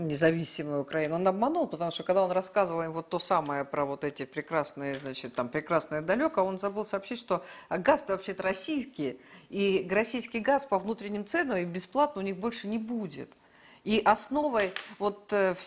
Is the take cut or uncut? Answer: uncut